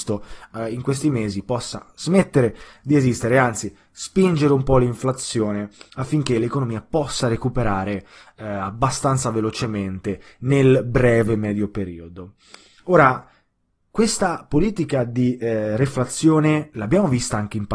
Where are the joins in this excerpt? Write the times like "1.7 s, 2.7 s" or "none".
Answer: none